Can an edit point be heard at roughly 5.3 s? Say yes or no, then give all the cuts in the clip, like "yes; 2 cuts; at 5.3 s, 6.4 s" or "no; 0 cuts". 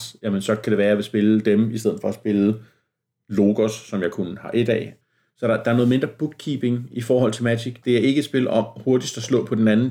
no; 1 cut; at 7.8 s